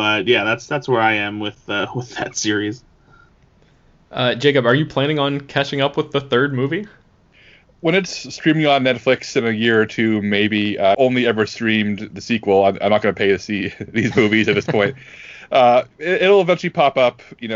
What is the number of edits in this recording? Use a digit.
1